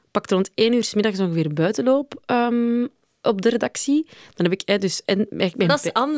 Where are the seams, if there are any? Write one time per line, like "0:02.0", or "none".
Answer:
none